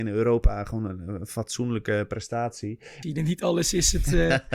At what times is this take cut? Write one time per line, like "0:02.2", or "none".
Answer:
0:03.0